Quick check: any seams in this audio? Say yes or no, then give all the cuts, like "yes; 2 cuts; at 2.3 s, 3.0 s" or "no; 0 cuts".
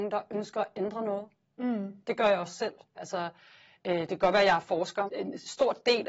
yes; 2 cuts; at 3.0 s, 5.1 s